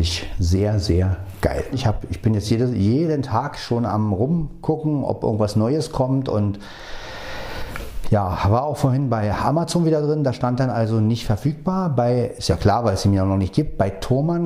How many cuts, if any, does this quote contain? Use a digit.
1